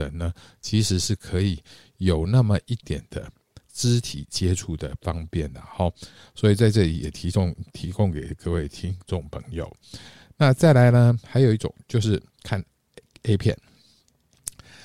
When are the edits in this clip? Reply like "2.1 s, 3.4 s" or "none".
2.8 s